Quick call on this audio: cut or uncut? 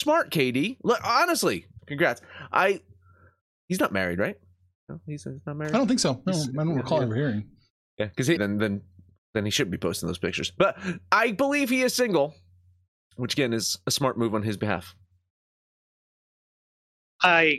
cut